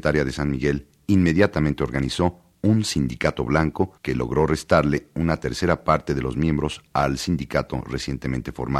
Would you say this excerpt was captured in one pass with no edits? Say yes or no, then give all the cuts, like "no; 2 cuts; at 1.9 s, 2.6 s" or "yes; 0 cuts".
no; 1 cut; at 4.0 s